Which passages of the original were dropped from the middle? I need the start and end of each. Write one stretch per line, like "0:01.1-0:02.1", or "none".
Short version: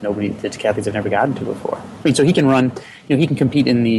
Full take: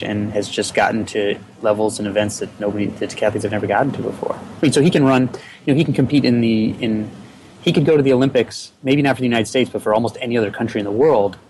none